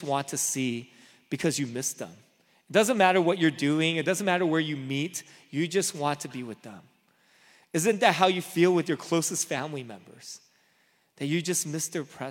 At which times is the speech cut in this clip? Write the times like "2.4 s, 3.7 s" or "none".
none